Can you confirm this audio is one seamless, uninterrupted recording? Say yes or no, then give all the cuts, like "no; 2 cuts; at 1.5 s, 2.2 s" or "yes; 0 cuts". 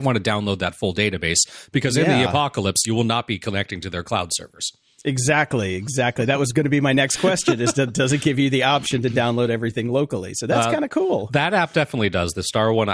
yes; 0 cuts